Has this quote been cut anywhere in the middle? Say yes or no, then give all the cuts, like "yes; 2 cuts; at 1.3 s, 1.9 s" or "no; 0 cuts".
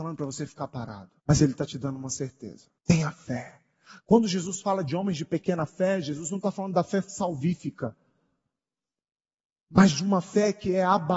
yes; 2 cuts; at 1.2 s, 2.8 s